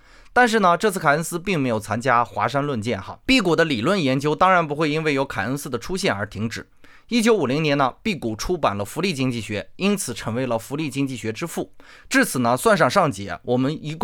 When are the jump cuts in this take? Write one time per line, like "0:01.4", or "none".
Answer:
0:03.2
0:11.9